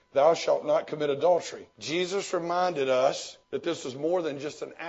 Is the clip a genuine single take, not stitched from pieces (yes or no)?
no